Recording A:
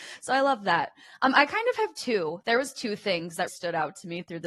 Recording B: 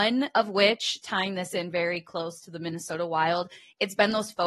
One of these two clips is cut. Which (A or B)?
A